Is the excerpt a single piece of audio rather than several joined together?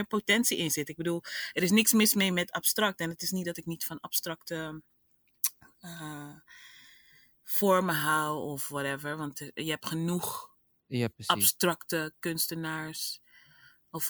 yes; 0 cuts

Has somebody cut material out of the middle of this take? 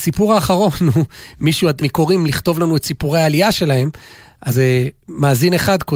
yes; 1 cut; at 1.8 s

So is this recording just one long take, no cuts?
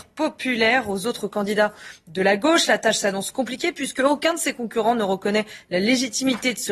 yes; 0 cuts

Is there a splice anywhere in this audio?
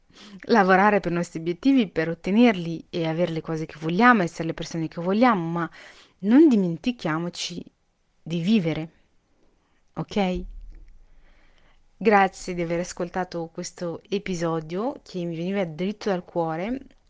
no; 0 cuts

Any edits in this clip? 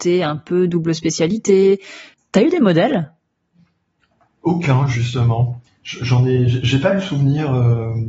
yes; 1 cut; at 5.7 s

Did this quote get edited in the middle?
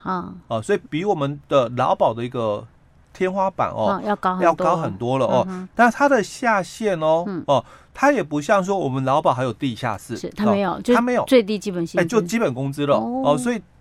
no; 0 cuts

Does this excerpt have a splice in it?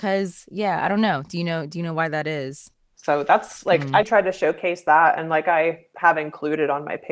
yes; 1 cut; at 2.9 s

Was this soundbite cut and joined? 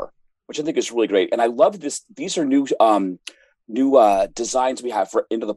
no; 0 cuts

